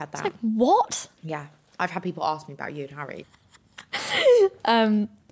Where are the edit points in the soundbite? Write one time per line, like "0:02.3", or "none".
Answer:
0:01.2
0:03.2